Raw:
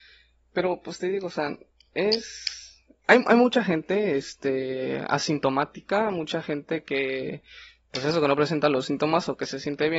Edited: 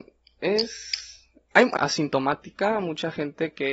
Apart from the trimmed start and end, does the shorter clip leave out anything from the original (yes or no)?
yes